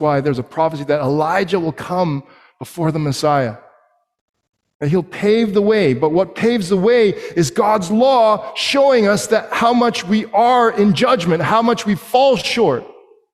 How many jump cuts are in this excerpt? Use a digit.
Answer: 0